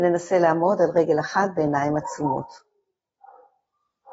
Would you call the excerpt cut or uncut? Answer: uncut